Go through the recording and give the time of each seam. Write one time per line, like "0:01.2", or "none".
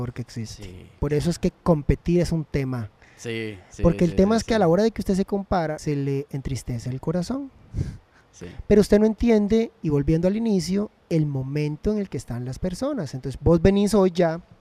0:05.8
0:13.4